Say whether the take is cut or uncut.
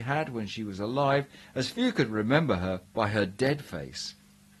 uncut